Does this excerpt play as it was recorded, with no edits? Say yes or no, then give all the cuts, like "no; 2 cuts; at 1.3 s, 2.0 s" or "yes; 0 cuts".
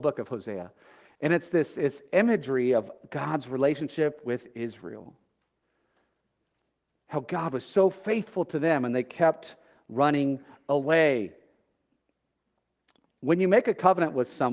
yes; 0 cuts